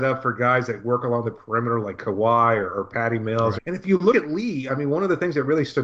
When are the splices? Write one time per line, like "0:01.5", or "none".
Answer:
0:03.6